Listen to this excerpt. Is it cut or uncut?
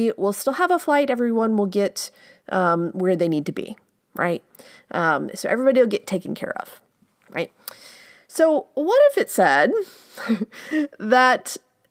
uncut